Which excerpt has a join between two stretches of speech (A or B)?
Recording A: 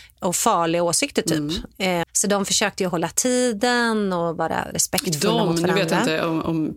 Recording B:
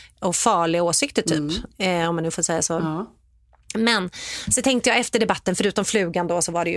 A